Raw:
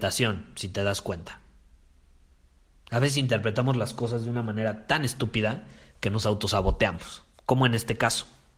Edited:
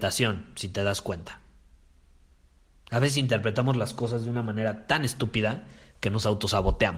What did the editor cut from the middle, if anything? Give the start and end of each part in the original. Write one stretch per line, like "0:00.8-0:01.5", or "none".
none